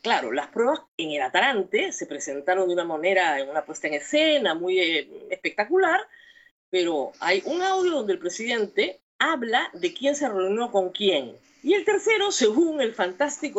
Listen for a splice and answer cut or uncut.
cut